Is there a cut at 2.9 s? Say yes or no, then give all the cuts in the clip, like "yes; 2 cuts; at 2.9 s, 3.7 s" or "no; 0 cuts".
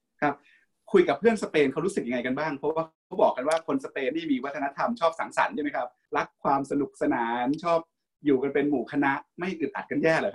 yes; 1 cut; at 2.9 s